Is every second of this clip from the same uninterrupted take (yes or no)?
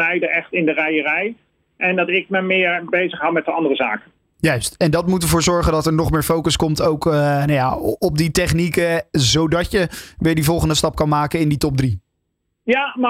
yes